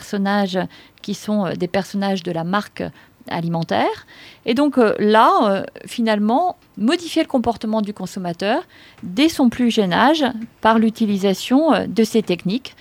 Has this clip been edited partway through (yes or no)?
yes